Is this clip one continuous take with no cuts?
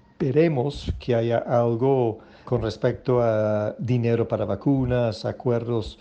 no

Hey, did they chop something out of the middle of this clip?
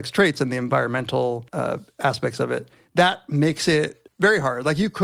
yes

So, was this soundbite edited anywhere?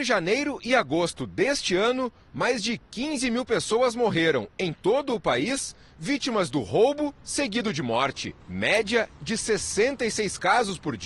yes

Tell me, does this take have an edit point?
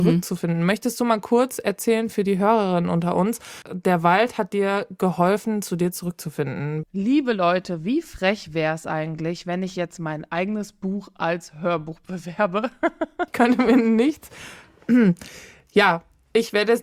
yes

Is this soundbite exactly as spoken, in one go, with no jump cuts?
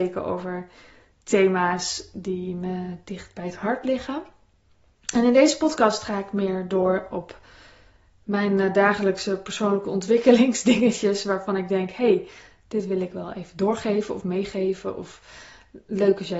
yes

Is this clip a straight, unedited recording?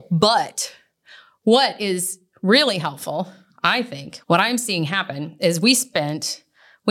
no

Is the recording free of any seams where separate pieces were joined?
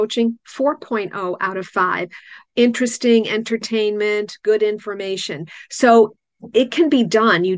yes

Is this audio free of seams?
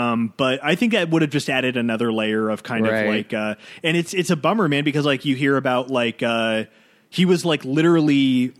yes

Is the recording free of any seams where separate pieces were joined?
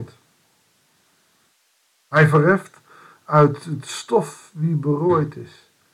yes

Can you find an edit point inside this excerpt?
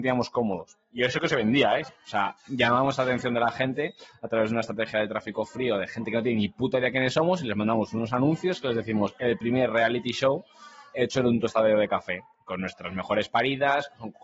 yes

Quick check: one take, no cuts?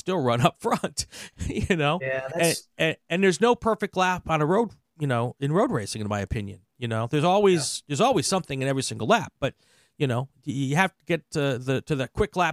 yes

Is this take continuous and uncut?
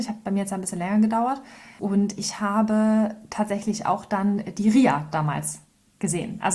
yes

